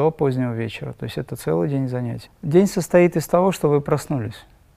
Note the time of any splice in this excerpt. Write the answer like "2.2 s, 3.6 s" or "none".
2.3 s